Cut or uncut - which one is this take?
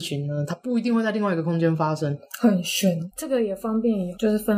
cut